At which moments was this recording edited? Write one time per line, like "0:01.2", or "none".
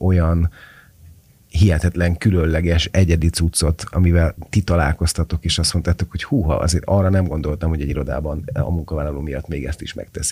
0:03.9